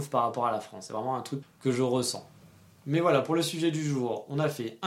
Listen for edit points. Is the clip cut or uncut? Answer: cut